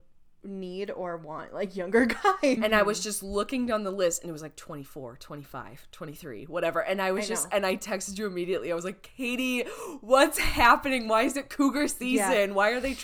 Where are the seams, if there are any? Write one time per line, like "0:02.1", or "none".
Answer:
0:02.6